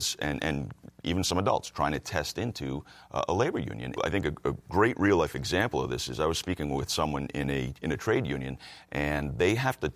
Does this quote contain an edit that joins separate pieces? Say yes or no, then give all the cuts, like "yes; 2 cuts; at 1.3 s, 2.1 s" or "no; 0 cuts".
yes; 1 cut; at 4.0 s